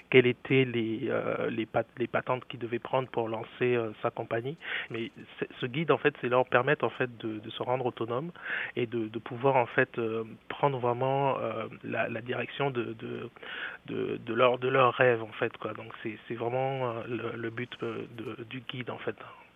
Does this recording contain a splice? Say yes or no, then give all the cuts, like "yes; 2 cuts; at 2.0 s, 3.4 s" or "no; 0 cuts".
yes; 1 cut; at 4.9 s